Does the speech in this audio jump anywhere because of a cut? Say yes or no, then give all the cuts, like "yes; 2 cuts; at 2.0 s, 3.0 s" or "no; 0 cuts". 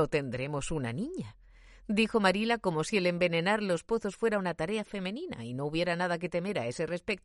no; 0 cuts